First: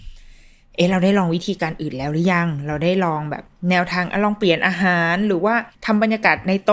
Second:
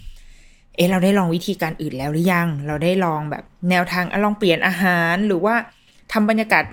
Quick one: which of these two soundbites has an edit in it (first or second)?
first